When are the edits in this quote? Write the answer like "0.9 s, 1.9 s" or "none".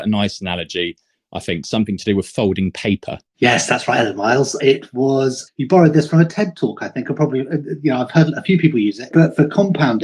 3.3 s, 9.1 s